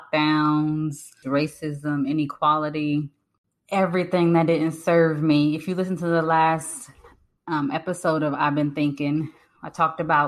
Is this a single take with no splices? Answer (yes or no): no